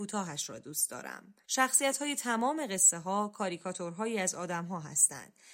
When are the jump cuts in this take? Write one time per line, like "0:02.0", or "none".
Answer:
0:01.4